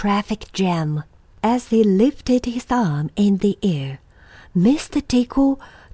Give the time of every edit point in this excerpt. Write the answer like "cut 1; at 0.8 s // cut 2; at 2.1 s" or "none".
cut 1; at 1.3 s